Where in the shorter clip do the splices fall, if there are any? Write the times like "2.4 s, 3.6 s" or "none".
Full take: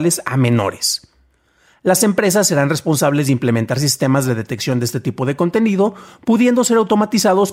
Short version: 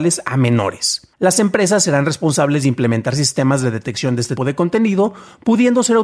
1.1 s, 4.4 s